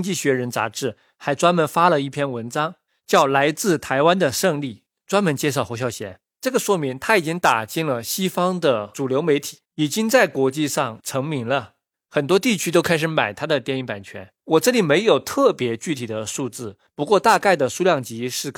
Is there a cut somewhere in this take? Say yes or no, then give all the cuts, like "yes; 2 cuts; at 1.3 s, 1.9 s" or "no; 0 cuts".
yes; 1 cut; at 9.6 s